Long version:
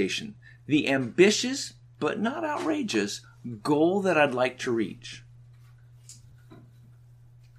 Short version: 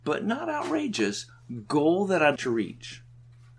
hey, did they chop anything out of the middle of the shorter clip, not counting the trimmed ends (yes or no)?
yes